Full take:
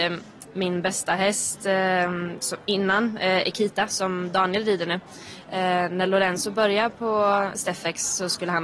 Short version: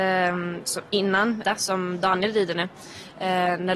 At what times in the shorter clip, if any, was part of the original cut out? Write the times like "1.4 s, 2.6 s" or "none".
1.4 s